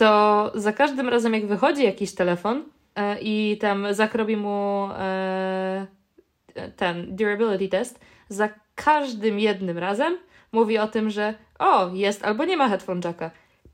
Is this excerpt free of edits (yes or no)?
yes